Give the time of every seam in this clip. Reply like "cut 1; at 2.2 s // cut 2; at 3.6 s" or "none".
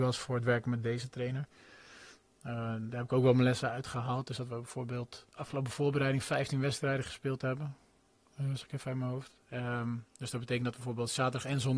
cut 1; at 5.3 s